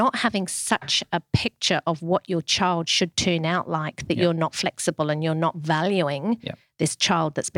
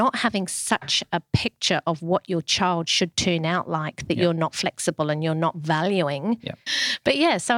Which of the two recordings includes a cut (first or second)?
second